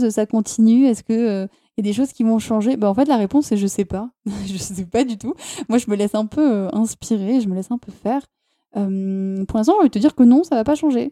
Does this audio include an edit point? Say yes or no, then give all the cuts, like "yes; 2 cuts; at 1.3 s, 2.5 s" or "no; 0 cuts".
no; 0 cuts